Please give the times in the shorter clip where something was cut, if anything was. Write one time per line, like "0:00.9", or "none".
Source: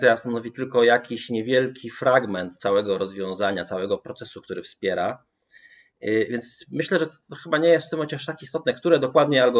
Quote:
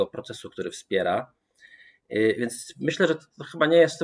none

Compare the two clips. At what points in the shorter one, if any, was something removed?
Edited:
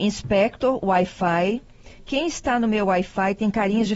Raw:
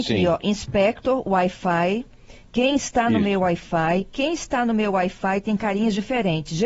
0:02.0

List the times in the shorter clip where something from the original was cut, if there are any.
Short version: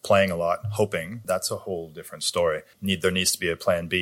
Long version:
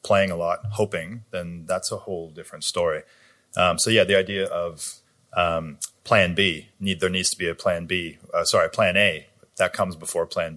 0:01.2
0:02.7

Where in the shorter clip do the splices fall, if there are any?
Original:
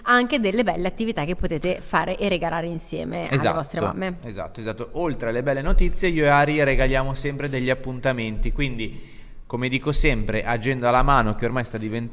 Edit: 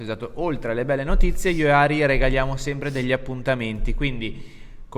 none

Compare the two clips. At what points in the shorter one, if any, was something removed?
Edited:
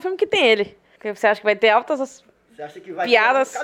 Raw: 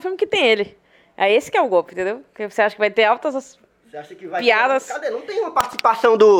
0:01.0

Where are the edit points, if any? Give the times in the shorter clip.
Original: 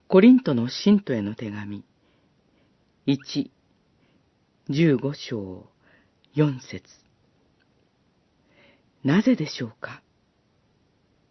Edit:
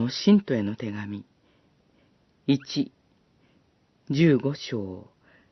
none

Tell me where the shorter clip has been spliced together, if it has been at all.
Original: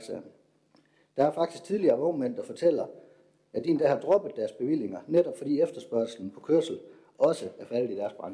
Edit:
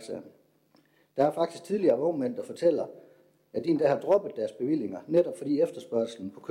none

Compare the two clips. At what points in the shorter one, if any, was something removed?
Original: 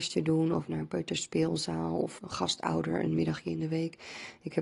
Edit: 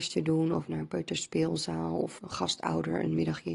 none

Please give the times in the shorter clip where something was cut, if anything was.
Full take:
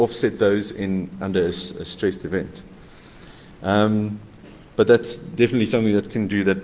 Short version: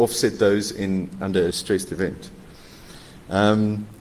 0:01.5

